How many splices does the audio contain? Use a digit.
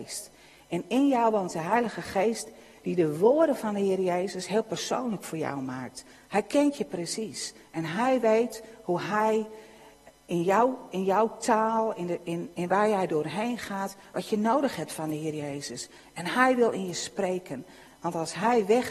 1